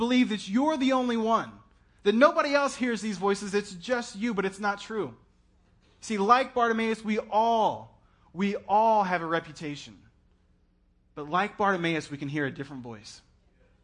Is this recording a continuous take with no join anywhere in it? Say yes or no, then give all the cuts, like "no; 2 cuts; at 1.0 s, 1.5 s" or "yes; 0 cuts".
yes; 0 cuts